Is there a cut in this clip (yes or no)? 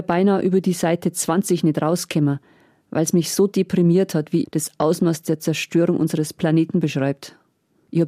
yes